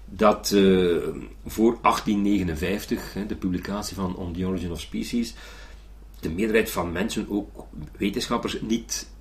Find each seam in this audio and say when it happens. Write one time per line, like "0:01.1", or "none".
0:06.2